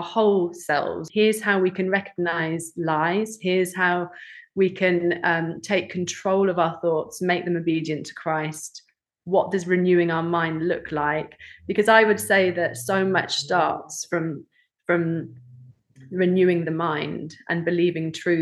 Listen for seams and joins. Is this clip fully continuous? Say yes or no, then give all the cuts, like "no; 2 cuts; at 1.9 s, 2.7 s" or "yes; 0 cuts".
no; 1 cut; at 1.1 s